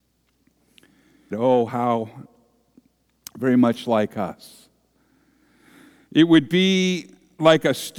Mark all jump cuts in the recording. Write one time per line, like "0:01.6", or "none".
0:01.3